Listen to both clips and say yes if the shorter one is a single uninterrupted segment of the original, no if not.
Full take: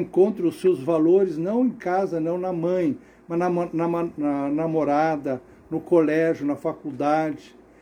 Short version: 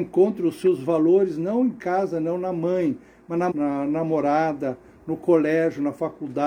no